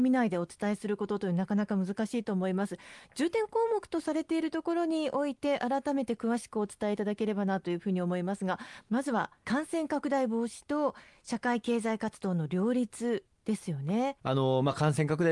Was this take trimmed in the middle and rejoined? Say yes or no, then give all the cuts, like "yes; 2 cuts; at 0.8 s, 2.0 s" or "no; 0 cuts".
yes; 1 cut; at 14.2 s